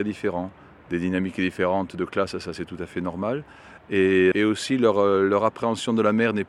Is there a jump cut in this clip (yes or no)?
yes